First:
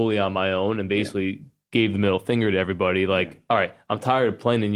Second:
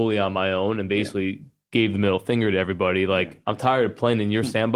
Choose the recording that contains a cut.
second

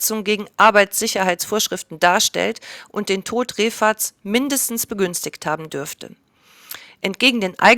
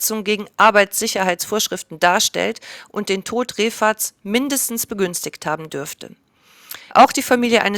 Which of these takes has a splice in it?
second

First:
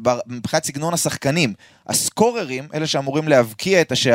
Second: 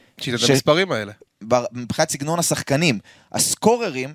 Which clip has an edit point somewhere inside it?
second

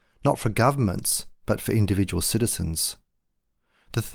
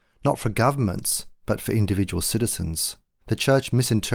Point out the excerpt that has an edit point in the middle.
second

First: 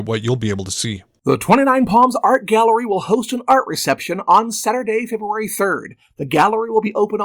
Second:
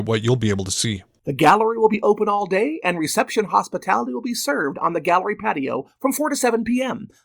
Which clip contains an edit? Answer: second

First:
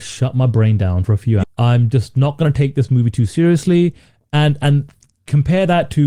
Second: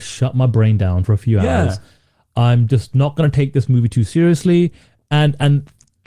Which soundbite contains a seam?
first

